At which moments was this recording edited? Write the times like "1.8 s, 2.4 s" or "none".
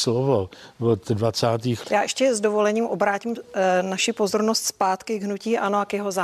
1.8 s